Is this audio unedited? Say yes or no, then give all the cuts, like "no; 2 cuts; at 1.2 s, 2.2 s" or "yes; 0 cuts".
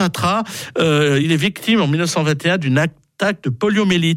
yes; 0 cuts